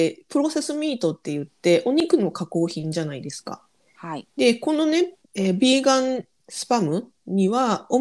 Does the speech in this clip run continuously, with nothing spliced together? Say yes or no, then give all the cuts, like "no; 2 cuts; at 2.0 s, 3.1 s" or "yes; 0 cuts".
no; 1 cut; at 5.2 s